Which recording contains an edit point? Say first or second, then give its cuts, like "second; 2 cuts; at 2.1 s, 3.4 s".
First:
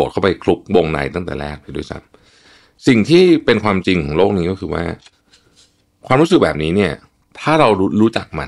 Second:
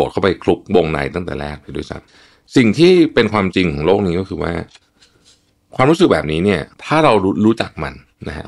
second; 2 cuts; at 2.1 s, 6.7 s